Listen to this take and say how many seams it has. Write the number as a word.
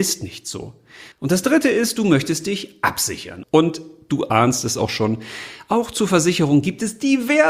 two